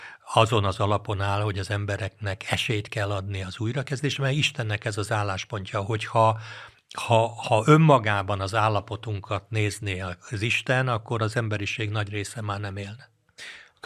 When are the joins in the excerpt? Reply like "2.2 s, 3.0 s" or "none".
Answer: none